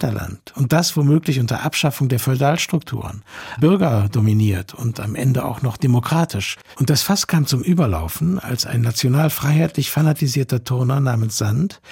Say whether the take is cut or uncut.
cut